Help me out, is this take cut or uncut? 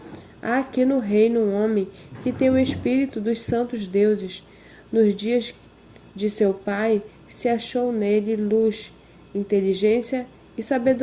uncut